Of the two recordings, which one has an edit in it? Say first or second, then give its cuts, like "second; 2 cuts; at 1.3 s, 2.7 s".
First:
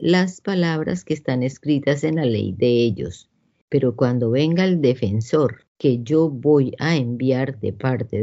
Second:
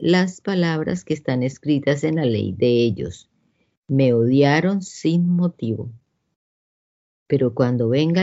first; 2 cuts; at 3.6 s, 5.7 s